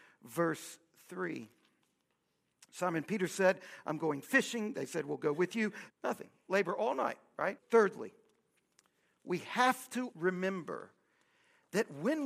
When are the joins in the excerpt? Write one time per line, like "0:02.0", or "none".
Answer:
0:05.9
0:07.6
0:10.1